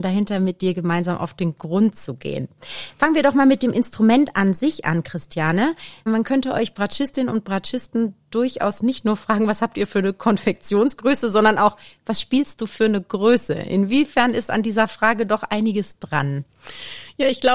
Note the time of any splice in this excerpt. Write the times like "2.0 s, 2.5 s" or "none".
none